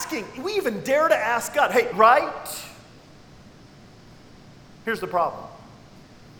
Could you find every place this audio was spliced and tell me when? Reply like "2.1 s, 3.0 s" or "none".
1.9 s